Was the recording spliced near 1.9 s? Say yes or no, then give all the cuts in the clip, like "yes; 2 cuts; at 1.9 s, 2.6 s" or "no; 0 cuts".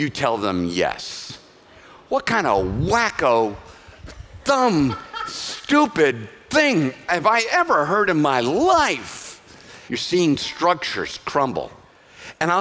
no; 1 cut; at 9.9 s